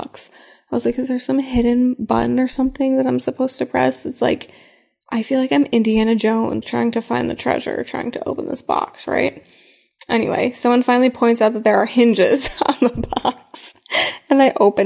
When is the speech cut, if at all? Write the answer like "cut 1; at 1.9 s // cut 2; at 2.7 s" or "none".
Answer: cut 1; at 6.6 s